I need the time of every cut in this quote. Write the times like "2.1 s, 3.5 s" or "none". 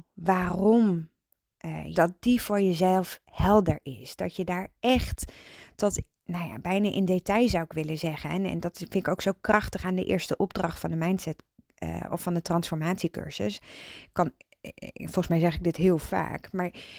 1.9 s